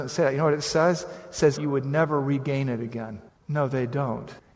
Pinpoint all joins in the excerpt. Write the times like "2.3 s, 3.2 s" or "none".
1.6 s, 3.4 s